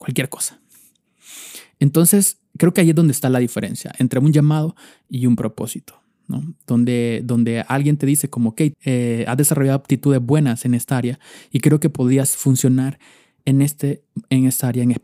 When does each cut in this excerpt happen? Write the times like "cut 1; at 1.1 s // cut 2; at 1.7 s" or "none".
cut 1; at 8.7 s